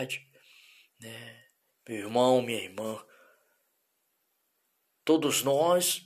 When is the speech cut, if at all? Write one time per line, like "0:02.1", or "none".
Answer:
0:01.7

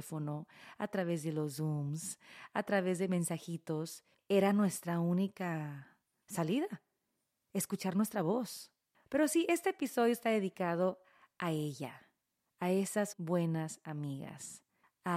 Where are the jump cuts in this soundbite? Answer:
0:04.2
0:13.1

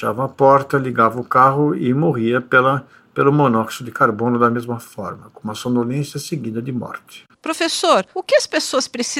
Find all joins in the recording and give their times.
0:07.3

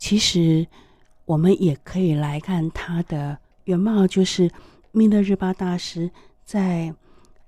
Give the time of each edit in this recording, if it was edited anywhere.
0:02.4

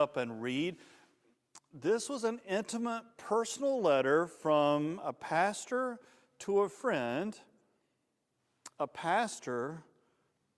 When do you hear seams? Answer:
none

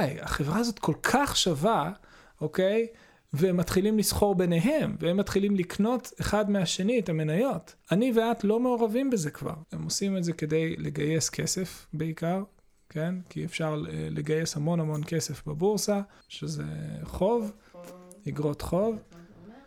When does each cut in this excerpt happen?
0:07.8
0:09.6
0:16.2

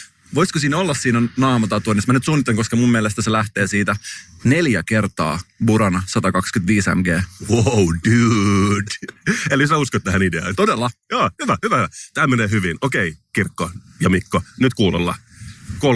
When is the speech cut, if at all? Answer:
none

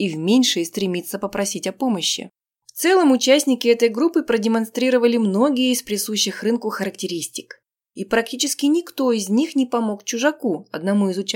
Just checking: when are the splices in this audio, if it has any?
0:02.5
0:07.8

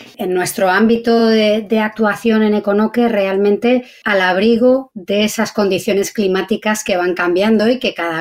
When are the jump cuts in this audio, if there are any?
none

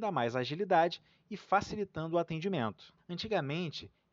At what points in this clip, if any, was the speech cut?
0:03.0

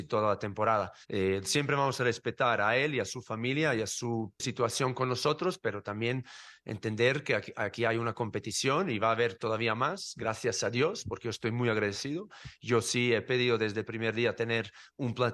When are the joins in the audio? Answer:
0:01.0

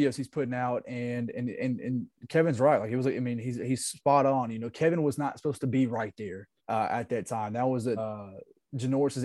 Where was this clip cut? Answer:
0:06.6
0:08.0

